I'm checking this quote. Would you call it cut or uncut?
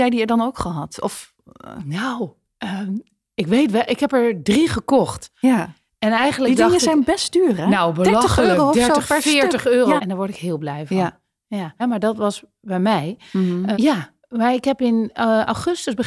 cut